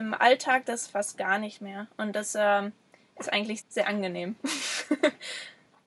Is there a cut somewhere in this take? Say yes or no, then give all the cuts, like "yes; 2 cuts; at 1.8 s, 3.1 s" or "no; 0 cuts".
yes; 1 cut; at 3.6 s